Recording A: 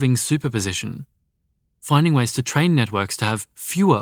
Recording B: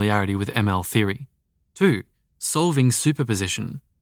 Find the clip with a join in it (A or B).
B